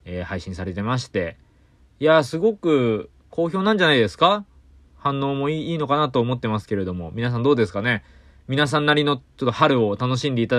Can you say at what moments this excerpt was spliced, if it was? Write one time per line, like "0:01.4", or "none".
none